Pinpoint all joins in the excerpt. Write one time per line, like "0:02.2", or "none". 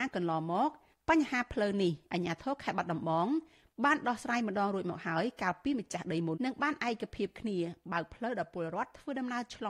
0:06.3